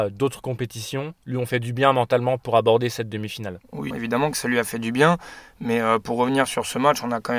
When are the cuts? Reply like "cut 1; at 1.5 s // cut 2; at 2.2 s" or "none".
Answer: cut 1; at 3.9 s